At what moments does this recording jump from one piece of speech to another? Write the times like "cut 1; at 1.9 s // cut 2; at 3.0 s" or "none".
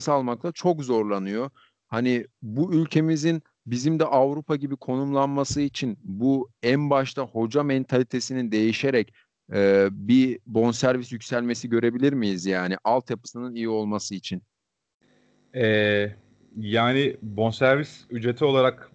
none